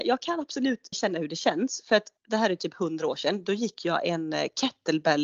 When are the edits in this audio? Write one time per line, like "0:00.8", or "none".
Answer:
0:00.9
0:02.2